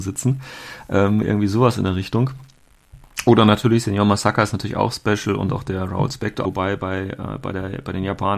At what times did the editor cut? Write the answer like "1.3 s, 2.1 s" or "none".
6.4 s